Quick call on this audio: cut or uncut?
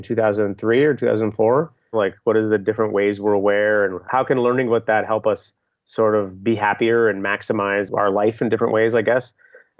cut